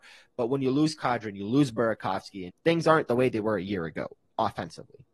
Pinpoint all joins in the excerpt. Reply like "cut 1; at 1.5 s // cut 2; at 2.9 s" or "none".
cut 1; at 2.5 s